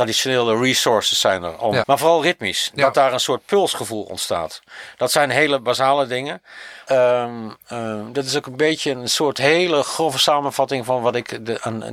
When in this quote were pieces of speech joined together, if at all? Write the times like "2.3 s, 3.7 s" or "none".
1.8 s, 6.9 s